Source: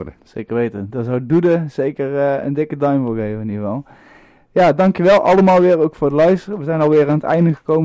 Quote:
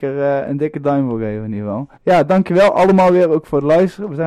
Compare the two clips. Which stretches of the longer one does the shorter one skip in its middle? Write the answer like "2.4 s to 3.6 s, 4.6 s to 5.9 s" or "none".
3.9 s to 4.4 s